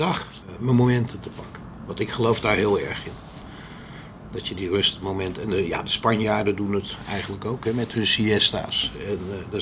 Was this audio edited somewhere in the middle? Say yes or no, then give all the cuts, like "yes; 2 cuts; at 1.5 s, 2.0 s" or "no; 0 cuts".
no; 0 cuts